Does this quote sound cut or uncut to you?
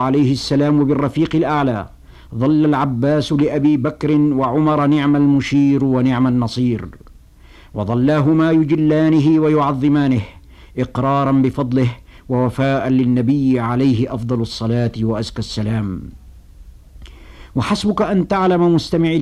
uncut